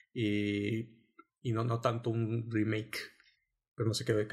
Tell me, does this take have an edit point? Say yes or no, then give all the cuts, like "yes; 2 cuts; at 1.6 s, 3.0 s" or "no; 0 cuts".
no; 0 cuts